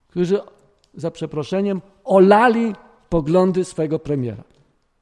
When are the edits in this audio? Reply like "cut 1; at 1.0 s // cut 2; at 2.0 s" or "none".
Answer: none